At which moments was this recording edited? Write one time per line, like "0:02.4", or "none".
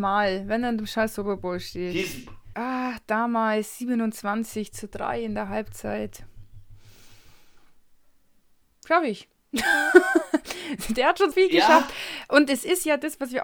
0:02.5
0:11.3